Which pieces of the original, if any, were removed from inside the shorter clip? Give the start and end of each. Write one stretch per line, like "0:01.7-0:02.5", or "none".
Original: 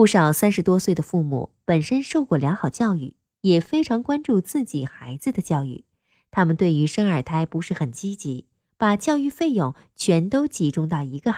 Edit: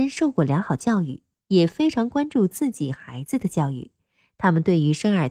none